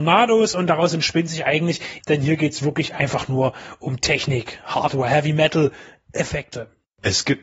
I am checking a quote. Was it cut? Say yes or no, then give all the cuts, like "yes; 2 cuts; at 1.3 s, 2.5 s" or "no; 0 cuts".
yes; 1 cut; at 2.0 s